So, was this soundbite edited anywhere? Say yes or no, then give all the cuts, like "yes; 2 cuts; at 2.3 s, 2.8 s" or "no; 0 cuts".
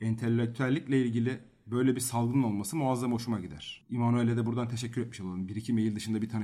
no; 0 cuts